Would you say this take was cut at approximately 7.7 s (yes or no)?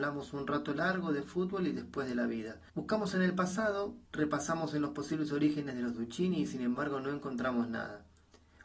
no